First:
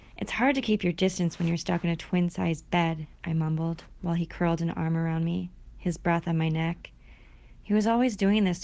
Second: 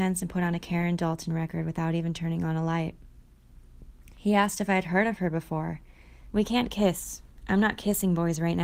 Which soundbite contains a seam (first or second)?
second